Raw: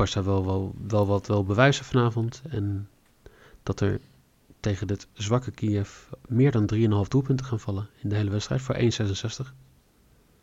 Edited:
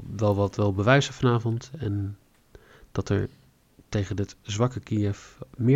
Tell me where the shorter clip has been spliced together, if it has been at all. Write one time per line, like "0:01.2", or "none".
none